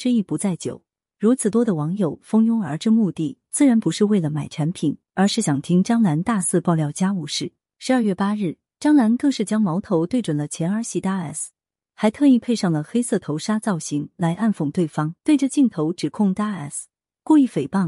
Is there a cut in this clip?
yes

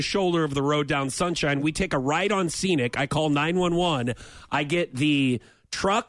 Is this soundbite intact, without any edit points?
yes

